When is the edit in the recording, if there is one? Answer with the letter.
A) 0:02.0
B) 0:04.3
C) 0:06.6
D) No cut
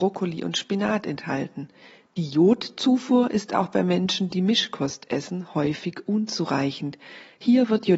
D